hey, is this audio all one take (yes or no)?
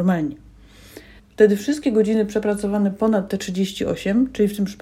no